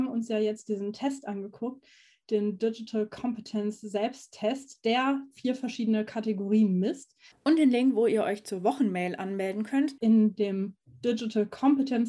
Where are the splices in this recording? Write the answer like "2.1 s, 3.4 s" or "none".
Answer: 7.3 s, 10.0 s